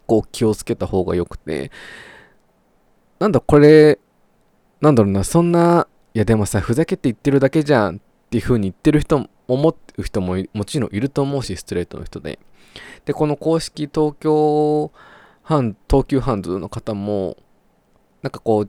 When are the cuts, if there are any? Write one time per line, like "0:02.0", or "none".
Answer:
none